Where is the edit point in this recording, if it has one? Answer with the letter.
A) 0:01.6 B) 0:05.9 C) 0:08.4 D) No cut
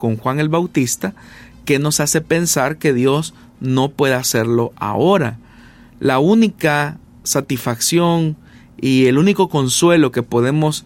D